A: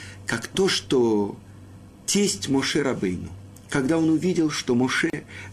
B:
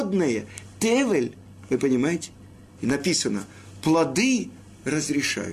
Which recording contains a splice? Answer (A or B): B